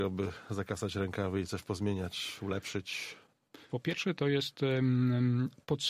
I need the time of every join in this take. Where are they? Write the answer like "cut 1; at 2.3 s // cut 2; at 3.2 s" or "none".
cut 1; at 3.7 s